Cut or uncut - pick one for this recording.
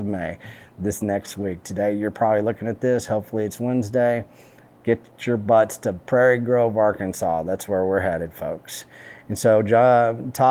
uncut